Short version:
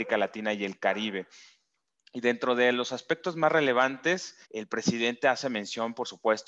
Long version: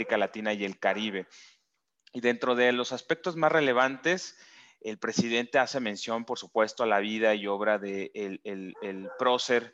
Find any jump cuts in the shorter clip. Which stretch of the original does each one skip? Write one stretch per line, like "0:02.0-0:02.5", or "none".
0:04.4-0:04.8